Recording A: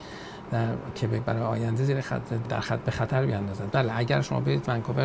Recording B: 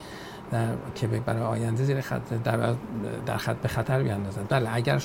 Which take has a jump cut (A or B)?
A